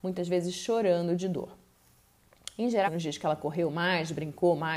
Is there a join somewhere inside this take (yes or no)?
yes